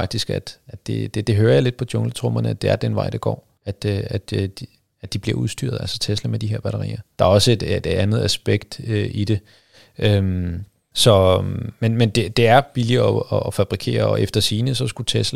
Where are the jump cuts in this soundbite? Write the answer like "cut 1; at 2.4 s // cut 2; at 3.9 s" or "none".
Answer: cut 1; at 7.2 s